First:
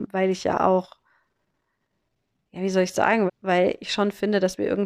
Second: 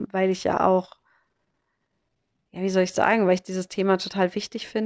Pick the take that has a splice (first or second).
first